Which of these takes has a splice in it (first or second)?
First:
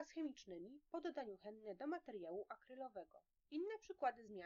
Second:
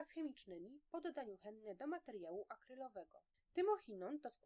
second